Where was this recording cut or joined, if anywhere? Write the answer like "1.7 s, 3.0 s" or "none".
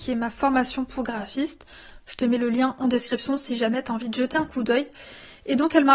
none